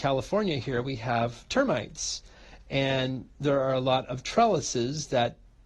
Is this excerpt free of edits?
yes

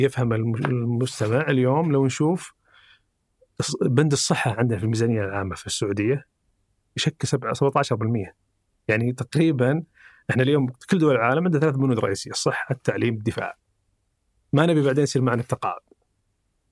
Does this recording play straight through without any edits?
yes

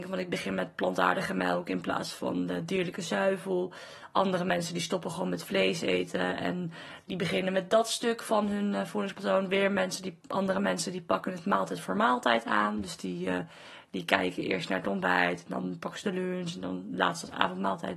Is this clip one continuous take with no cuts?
yes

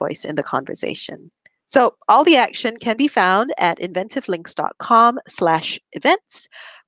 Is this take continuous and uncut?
yes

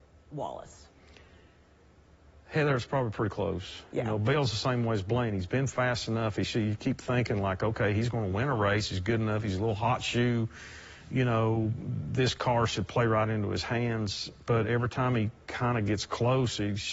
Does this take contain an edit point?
no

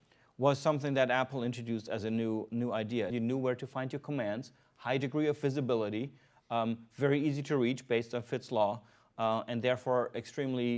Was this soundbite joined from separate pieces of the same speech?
yes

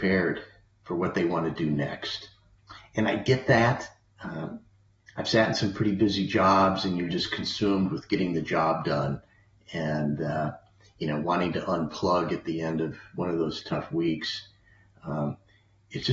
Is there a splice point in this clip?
no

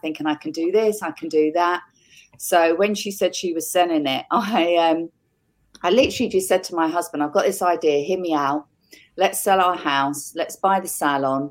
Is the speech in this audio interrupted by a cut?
no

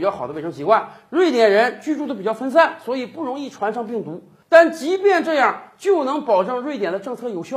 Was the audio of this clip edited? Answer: no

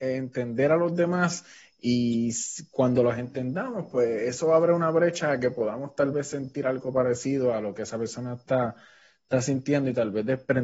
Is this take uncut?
yes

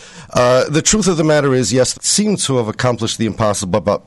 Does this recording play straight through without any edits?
no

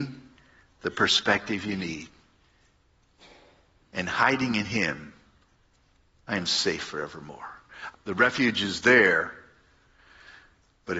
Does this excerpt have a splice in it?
yes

